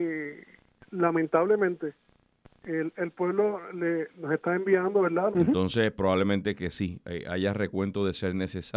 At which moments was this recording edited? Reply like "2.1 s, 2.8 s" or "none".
4.1 s, 5.3 s